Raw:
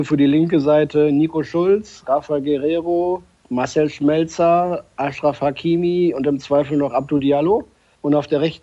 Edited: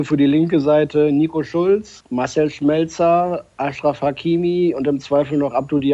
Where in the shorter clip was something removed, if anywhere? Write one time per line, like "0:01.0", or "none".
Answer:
0:02.0